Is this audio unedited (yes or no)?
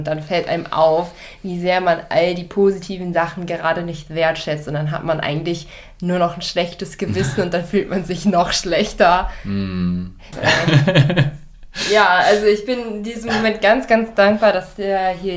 no